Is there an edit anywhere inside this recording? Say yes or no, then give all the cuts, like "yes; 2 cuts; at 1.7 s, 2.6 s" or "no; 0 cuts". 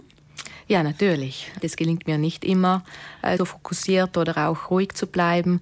yes; 2 cuts; at 1.6 s, 3.4 s